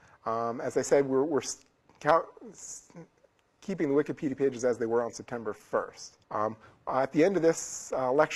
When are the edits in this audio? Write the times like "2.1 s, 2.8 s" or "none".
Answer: 6.2 s